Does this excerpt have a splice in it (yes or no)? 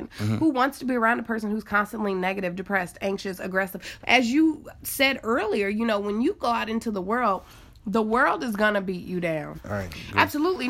yes